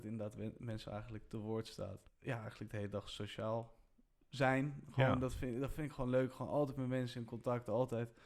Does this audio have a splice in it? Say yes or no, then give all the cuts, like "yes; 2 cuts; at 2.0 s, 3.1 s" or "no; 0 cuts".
no; 0 cuts